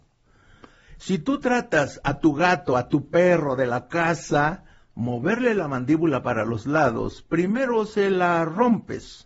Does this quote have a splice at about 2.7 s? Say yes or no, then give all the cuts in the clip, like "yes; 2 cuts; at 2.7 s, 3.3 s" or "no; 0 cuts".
no; 0 cuts